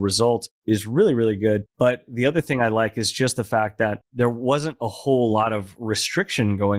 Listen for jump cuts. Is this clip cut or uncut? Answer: uncut